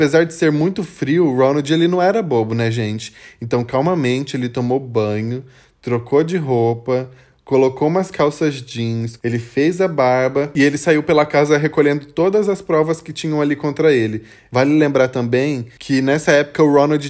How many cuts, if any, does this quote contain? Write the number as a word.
two